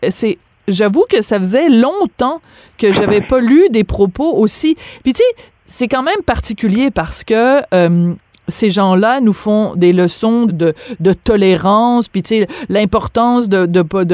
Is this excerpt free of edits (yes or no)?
no